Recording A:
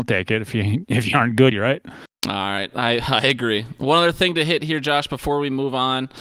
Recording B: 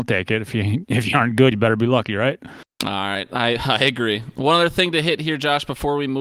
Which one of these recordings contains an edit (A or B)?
A